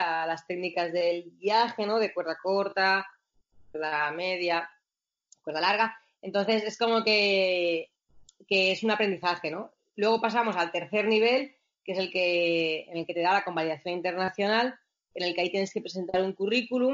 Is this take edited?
no; 0 cuts

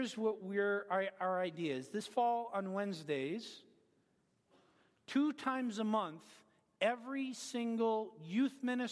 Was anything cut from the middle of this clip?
no; 0 cuts

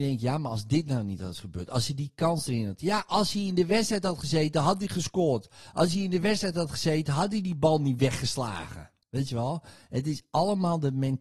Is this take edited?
no; 0 cuts

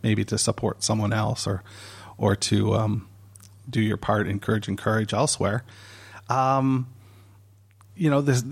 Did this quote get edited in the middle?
no; 0 cuts

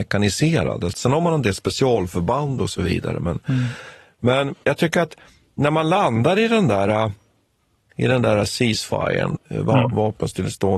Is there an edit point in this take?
yes; 3 cuts; at 0.9 s, 4.6 s, 9.4 s

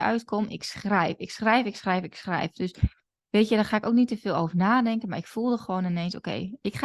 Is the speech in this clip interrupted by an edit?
no; 0 cuts

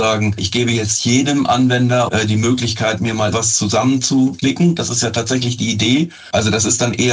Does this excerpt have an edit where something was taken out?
yes; 1 cut; at 3.3 s

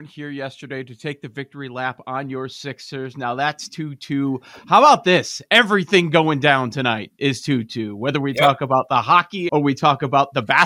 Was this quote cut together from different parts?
yes; 1 cut; at 9.5 s

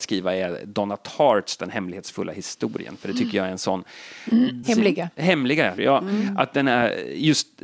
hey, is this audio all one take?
no; 2 cuts; at 4.6 s, 5.8 s

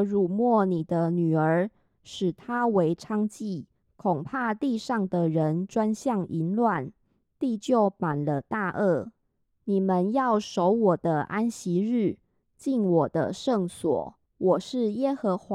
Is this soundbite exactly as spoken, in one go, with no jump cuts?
no; 1 cut; at 14.3 s

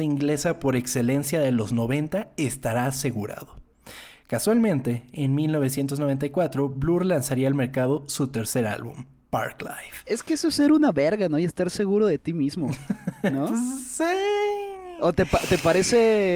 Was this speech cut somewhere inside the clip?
no; 0 cuts

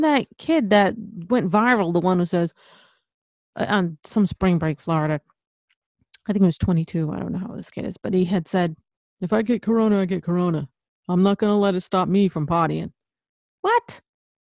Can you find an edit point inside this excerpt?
no; 0 cuts

